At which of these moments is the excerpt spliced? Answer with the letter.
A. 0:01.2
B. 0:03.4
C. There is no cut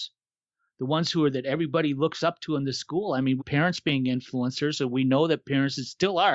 B